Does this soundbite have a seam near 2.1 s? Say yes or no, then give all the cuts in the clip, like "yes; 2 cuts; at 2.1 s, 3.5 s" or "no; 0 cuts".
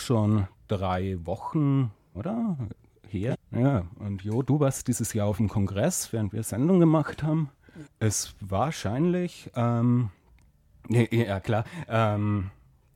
yes; 3 cuts; at 2.1 s, 3.3 s, 7.8 s